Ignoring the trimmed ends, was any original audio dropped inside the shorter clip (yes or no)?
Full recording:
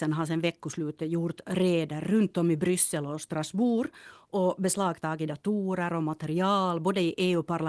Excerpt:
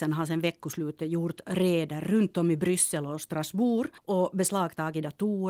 yes